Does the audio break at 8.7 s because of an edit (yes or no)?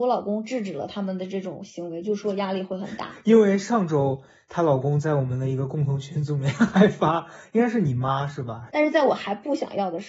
yes